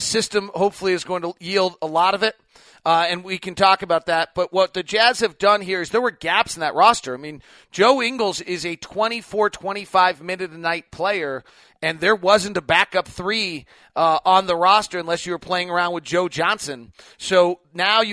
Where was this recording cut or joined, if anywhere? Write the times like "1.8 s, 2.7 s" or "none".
none